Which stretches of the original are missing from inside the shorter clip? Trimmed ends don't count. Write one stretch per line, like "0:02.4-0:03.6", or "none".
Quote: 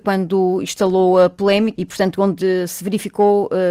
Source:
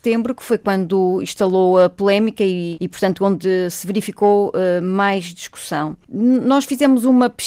0:02.4-0:02.8